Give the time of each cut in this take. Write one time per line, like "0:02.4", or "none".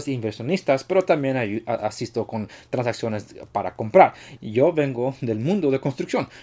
0:04.4